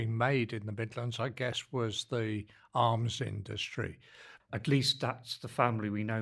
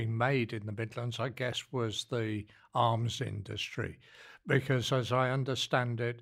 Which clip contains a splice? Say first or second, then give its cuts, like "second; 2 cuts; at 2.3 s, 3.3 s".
first; 1 cut; at 4.4 s